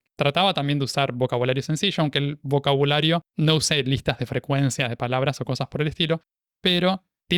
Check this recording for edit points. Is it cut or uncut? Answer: uncut